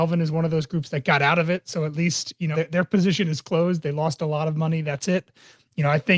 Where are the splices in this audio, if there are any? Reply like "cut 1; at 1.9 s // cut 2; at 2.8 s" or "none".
cut 1; at 2.5 s